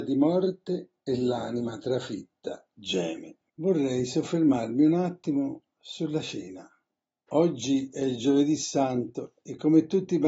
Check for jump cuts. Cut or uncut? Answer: cut